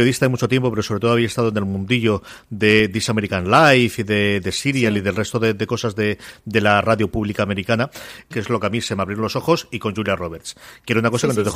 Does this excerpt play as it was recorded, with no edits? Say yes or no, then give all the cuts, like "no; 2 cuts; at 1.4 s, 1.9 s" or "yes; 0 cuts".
no; 1 cut; at 8.3 s